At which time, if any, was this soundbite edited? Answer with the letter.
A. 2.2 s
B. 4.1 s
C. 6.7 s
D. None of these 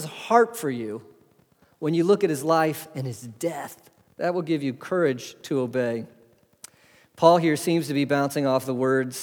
B